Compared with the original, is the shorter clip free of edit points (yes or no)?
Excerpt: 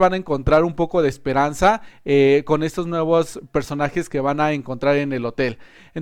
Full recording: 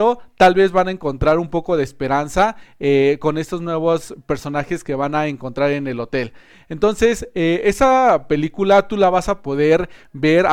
yes